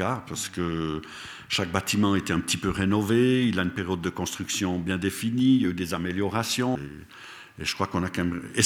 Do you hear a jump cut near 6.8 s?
yes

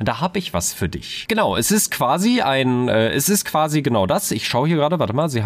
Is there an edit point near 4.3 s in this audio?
no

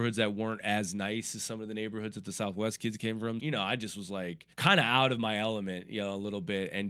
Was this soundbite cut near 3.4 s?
yes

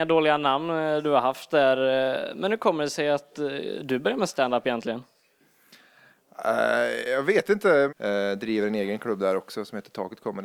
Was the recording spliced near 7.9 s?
yes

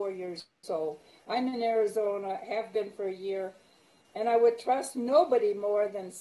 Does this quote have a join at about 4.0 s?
yes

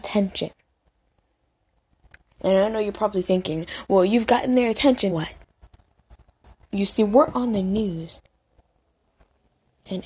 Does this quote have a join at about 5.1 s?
yes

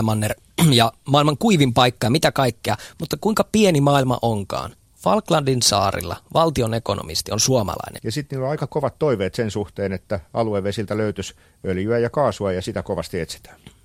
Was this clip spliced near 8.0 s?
yes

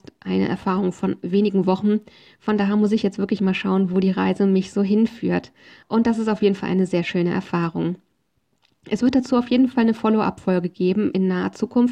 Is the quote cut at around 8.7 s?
no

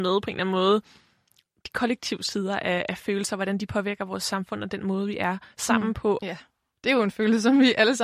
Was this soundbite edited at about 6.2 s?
yes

